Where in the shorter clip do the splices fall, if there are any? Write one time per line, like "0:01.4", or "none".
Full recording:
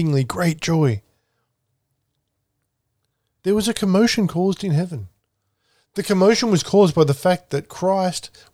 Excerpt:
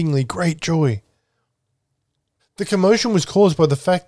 0:02.4